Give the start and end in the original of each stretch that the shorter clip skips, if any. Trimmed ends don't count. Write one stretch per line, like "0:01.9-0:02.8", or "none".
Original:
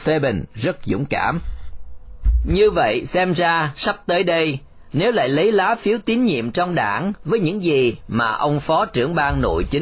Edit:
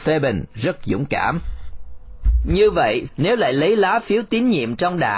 0:03.1-0:04.8

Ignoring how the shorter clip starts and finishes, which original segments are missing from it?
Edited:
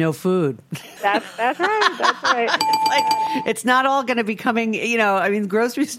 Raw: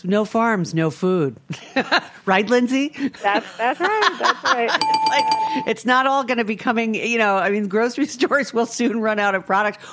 0:01.7-0:03.2

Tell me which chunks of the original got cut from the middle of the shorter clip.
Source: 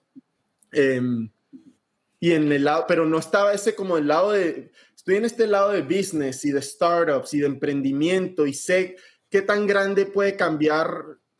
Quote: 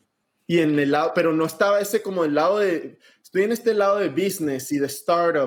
none

